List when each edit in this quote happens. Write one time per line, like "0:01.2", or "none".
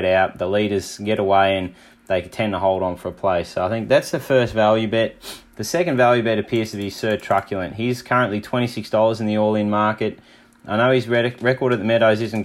none